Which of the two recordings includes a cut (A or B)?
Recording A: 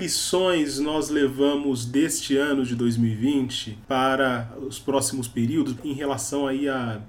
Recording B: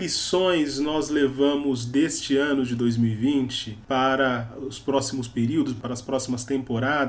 A